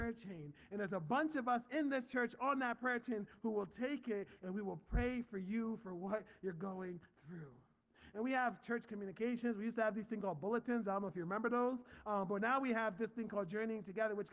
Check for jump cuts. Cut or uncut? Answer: uncut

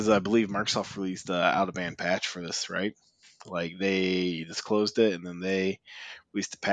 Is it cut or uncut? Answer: uncut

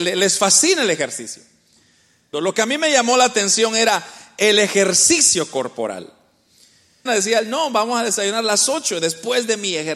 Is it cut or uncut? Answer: cut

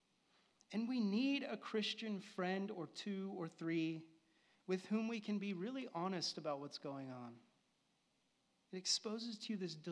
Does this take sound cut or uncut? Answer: cut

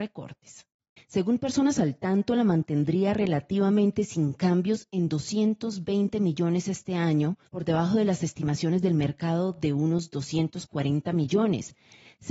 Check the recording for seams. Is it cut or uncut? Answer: cut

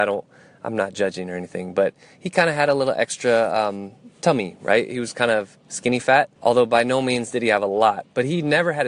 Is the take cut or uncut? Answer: cut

